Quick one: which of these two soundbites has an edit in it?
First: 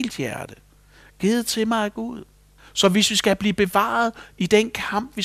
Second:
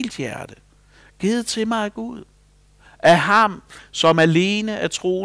first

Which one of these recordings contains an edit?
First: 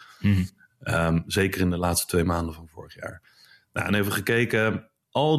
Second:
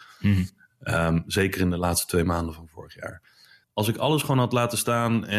second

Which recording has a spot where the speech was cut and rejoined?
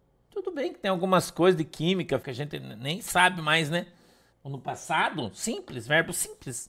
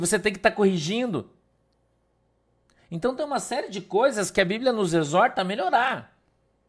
first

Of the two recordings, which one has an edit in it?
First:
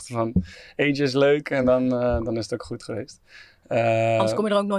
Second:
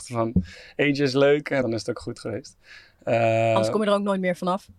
second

